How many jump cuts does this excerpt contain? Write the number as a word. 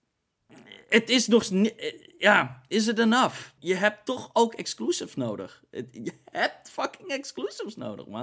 one